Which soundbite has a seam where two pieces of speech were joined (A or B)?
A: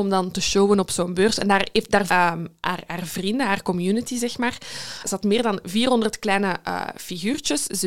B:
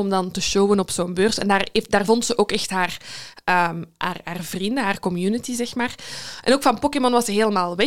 A